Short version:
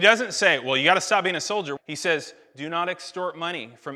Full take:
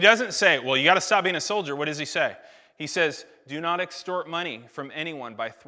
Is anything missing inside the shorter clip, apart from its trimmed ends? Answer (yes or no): yes